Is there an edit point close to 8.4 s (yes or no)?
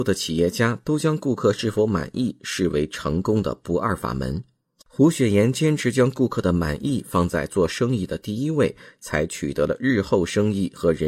no